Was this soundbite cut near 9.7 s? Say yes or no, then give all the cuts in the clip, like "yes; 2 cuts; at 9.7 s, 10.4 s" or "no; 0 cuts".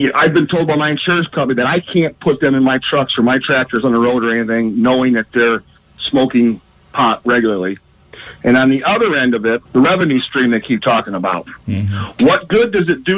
yes; 1 cut; at 9.7 s